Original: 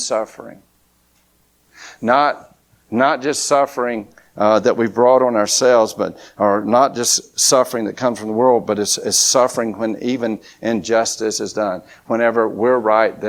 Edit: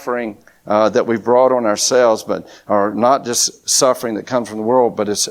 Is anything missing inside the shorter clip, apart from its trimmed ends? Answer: no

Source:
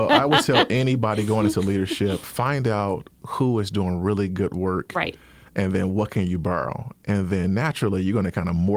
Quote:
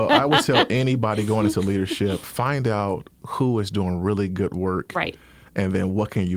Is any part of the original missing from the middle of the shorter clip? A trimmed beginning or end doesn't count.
no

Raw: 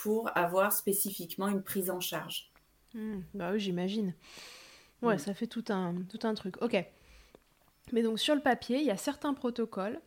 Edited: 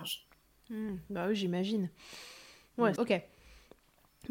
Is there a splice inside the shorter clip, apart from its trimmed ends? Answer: yes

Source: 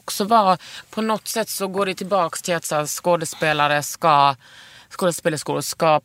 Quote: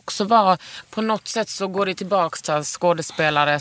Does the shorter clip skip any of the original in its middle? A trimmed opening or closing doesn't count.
yes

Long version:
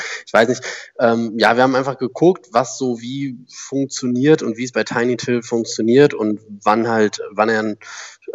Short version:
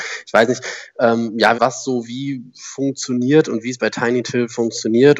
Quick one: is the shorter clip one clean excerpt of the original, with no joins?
no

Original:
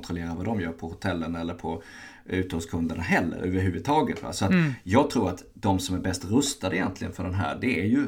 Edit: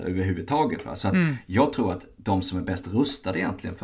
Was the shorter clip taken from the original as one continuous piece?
yes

